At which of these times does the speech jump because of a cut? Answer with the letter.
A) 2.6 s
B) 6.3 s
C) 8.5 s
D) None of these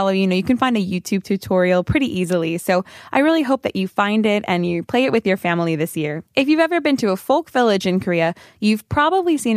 B